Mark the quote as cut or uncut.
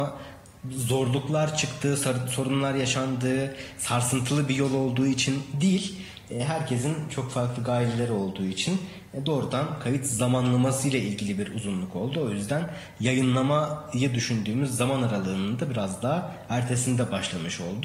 uncut